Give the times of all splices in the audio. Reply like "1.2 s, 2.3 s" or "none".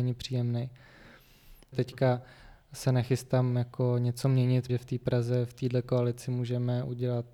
1.7 s, 4.7 s